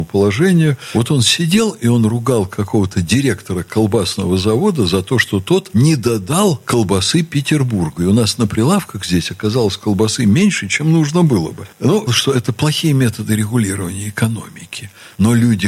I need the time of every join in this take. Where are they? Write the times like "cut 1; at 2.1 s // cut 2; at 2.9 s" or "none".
cut 1; at 12.1 s